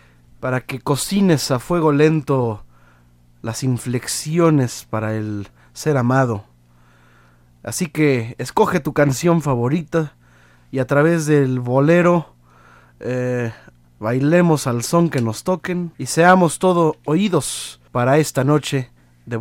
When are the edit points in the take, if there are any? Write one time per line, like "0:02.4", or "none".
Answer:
0:13.8
0:15.9
0:17.9

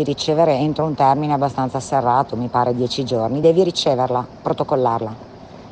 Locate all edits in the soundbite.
none

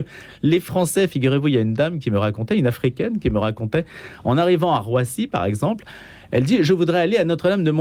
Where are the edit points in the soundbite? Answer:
none

